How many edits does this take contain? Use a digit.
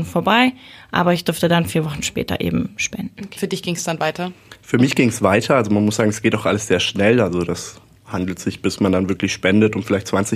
1